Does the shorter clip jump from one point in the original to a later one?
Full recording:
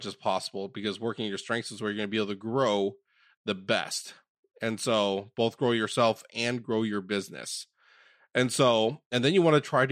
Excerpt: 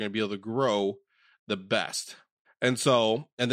yes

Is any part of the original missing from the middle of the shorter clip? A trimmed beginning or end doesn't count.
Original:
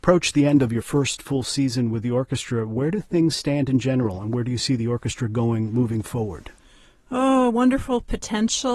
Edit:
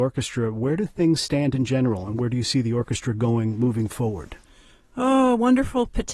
no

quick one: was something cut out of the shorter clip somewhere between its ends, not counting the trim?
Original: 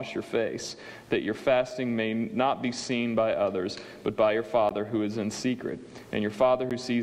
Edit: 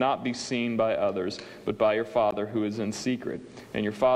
no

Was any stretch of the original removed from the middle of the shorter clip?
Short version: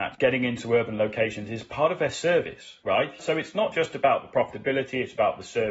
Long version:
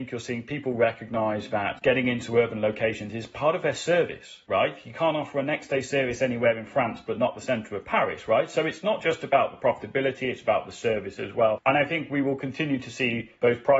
yes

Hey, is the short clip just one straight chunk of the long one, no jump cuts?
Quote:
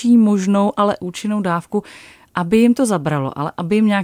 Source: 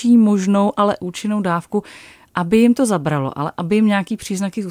yes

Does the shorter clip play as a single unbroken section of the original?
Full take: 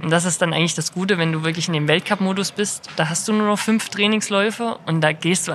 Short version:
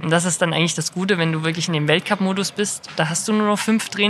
yes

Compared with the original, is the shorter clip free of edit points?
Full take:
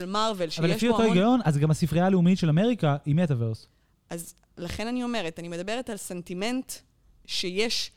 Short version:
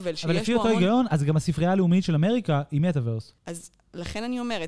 no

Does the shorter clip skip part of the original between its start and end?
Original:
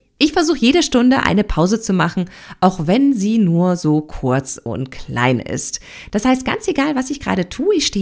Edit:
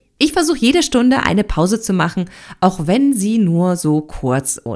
no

